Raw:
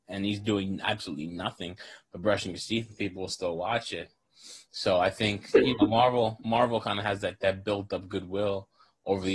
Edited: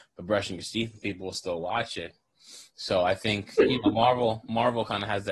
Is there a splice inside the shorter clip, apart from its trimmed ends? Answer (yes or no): no